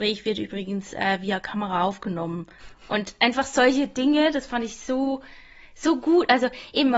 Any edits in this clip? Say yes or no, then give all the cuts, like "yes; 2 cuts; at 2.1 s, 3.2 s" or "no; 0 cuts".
no; 0 cuts